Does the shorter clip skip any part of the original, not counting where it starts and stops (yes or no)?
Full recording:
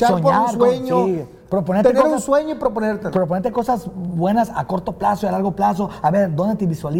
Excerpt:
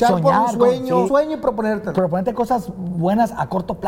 yes